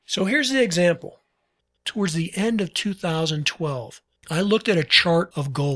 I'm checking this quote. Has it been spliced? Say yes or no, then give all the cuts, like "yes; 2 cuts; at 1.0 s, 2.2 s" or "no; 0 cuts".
no; 0 cuts